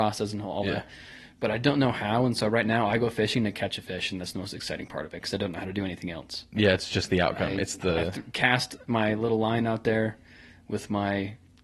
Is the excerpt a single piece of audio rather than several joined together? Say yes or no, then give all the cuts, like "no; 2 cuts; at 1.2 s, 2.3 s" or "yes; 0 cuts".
yes; 0 cuts